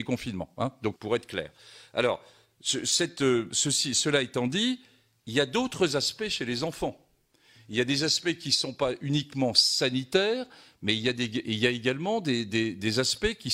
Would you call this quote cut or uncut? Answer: cut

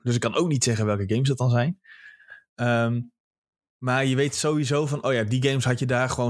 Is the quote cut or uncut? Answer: uncut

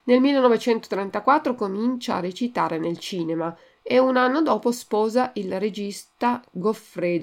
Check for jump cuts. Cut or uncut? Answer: cut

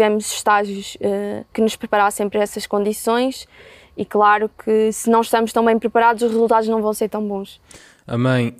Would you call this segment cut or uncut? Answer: cut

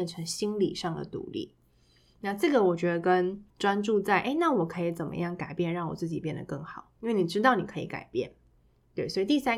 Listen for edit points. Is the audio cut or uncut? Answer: cut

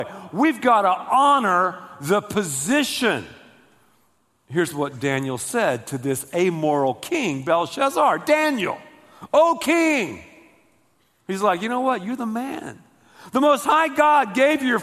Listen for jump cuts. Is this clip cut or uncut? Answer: uncut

